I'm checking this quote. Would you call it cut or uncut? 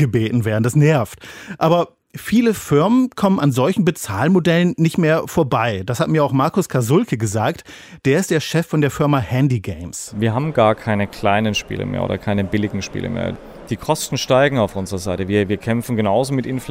uncut